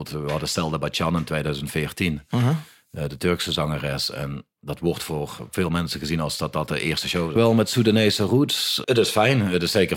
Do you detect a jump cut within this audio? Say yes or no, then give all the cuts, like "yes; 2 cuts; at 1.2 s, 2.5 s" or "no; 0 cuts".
yes; 2 cuts; at 7.4 s, 8.8 s